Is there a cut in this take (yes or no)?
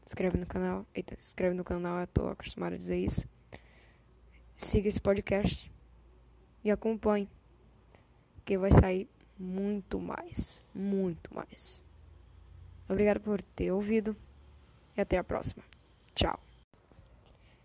no